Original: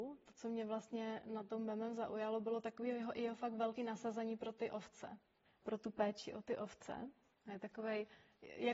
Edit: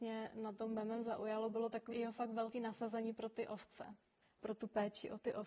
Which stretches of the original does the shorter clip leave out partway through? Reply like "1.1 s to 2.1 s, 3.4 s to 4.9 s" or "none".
2.8 s to 3.1 s